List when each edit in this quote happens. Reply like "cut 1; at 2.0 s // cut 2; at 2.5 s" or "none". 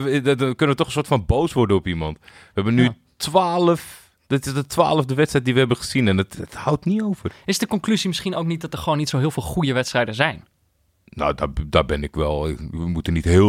none